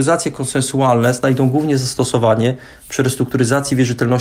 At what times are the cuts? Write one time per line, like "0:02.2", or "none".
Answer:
none